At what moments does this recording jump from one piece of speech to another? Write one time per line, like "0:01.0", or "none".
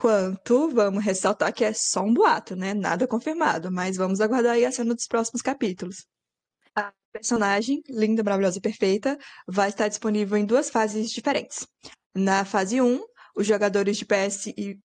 0:06.7